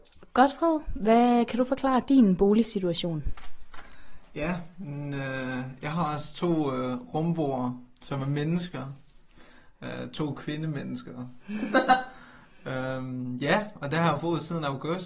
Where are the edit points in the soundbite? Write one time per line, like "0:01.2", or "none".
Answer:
none